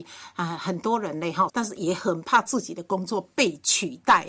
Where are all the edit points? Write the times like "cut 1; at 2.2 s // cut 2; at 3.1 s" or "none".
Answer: cut 1; at 1.5 s